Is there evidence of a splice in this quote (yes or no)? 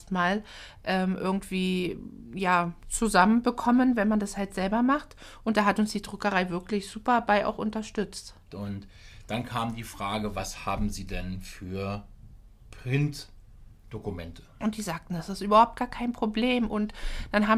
yes